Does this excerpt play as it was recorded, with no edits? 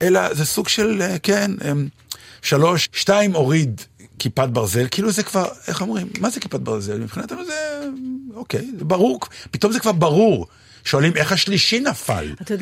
no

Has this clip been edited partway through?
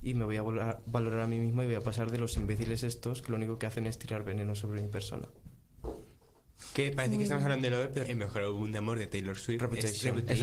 yes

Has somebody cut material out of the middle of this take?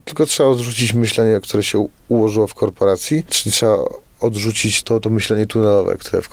yes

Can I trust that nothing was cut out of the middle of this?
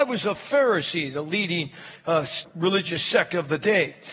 no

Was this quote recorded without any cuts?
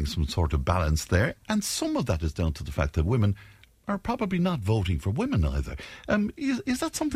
yes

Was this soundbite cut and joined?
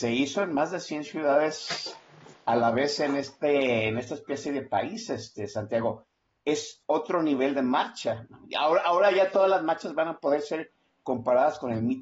no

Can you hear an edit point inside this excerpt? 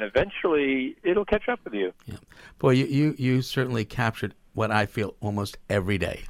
no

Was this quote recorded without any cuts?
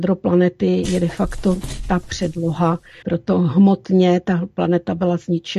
no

